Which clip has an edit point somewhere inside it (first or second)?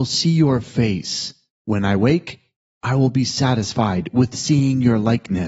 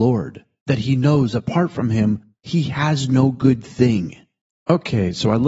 second